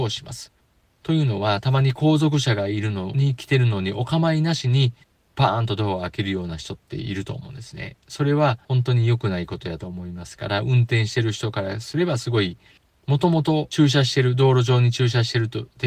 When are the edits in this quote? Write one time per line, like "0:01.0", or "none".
none